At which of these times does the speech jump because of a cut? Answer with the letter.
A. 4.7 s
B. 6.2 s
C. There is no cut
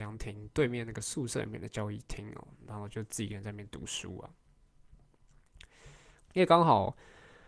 B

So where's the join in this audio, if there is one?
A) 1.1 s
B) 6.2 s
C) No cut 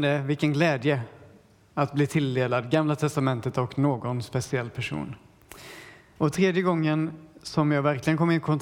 B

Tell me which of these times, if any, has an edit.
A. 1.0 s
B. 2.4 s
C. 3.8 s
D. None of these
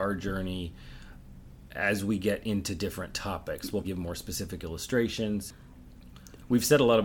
C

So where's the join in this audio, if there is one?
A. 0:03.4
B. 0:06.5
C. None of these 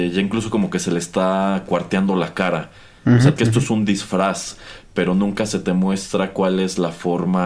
A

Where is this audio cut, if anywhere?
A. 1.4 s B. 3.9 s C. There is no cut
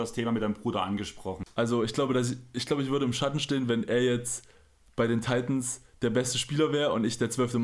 A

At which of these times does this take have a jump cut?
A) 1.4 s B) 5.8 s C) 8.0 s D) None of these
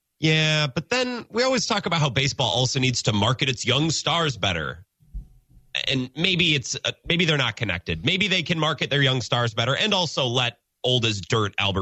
D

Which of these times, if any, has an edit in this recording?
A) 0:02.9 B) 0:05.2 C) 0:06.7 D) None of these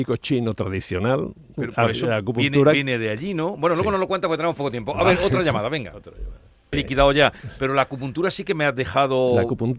C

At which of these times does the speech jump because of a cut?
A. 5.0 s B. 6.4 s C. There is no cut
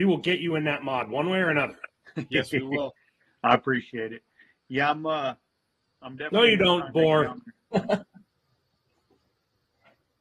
C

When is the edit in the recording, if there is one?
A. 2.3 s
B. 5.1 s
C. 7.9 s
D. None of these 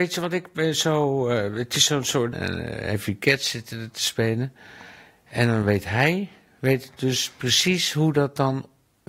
A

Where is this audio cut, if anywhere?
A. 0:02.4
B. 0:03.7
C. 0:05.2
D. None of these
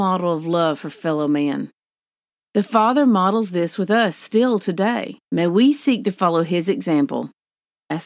C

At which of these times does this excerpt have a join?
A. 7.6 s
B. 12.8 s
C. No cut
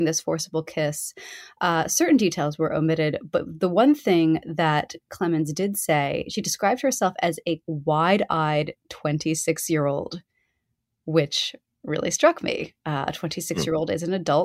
A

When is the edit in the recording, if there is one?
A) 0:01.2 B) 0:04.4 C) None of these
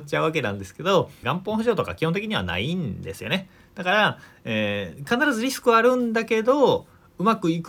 A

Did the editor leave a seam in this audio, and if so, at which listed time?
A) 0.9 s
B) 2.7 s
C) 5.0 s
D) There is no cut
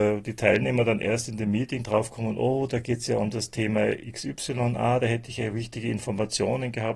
D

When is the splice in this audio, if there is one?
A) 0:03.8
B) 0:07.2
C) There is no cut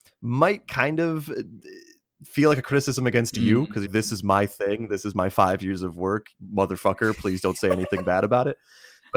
A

